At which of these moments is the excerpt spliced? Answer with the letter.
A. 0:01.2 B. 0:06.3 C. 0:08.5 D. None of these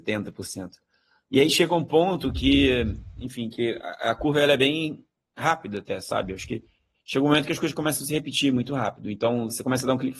D